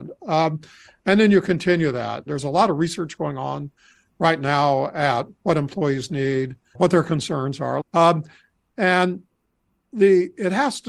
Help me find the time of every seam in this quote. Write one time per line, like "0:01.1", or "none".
0:02.3
0:06.7
0:07.8